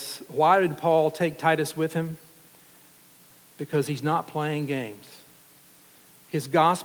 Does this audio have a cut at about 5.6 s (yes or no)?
no